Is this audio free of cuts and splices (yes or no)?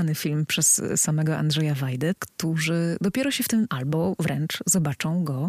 no